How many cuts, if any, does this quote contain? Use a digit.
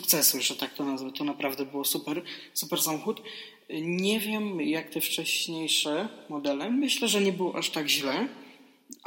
0